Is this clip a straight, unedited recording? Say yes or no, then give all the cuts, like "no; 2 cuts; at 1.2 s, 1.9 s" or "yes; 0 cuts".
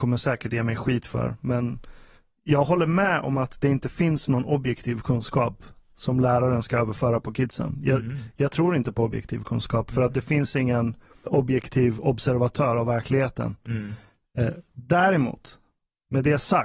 no; 1 cut; at 11.3 s